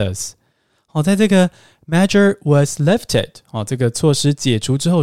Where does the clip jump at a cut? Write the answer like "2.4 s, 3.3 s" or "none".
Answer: none